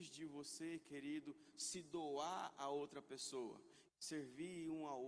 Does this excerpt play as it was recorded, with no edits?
no; 1 cut; at 3.9 s

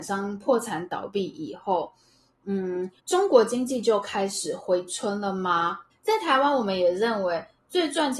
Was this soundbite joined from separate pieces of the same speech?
yes; 2 cuts; at 3.0 s, 5.9 s

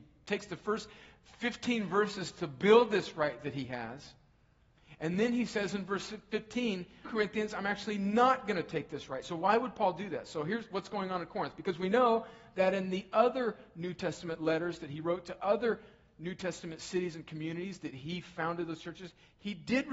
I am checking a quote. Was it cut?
yes; 1 cut; at 7.0 s

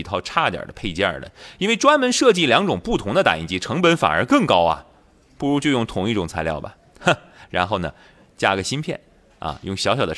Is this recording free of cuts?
yes; 0 cuts

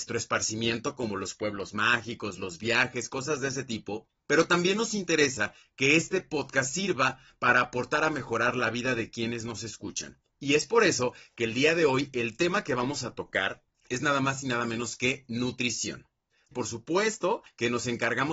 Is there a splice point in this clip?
no; 0 cuts

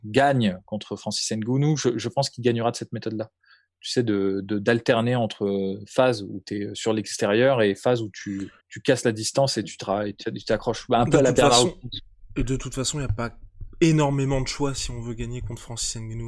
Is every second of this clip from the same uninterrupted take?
no; 1 cut; at 8.6 s

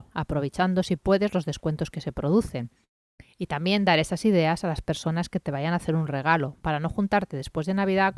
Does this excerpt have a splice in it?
no; 0 cuts

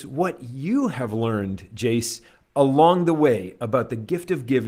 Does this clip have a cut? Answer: no; 0 cuts

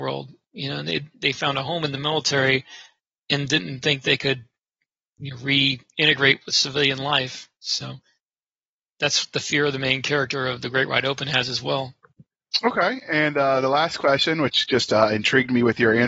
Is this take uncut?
yes; 0 cuts

